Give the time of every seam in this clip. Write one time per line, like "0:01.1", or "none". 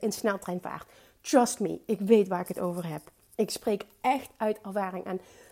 none